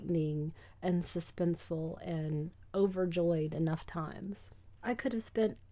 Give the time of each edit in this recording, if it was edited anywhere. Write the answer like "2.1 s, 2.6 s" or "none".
4.8 s